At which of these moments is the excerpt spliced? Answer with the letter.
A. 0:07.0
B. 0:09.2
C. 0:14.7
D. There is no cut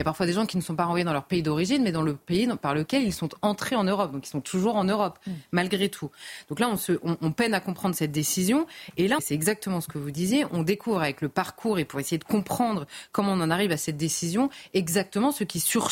B